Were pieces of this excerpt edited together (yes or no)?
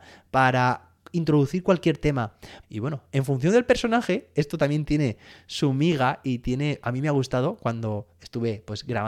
yes